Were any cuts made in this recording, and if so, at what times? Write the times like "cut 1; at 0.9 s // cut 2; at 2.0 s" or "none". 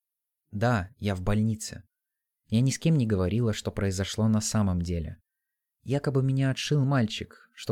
cut 1; at 2.4 s // cut 2; at 5.7 s